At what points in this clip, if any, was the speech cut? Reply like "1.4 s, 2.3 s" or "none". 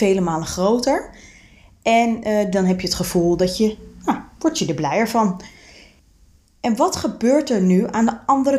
2.5 s